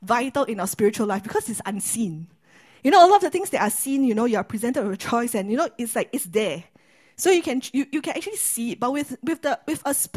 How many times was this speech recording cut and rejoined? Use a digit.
0